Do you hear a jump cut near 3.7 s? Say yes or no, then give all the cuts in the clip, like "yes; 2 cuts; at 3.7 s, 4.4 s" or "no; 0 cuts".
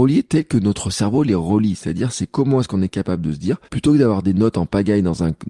yes; 1 cut; at 3.7 s